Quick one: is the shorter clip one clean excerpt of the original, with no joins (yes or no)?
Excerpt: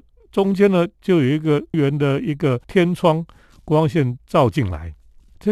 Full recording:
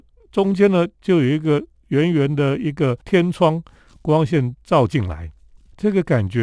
no